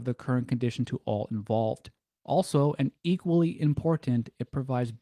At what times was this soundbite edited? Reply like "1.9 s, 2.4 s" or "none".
2.2 s